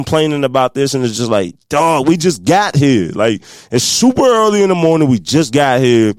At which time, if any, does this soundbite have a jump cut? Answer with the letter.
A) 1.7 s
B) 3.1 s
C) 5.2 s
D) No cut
D